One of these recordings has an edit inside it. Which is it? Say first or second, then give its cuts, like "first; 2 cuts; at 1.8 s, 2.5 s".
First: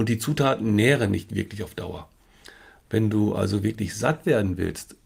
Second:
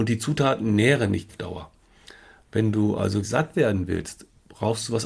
second; 2 cuts; at 1.3 s, 3.2 s